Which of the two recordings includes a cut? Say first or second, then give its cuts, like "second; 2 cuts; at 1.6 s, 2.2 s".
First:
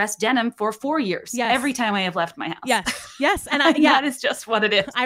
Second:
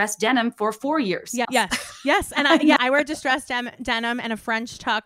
second; 2 cuts; at 1.4 s, 2.8 s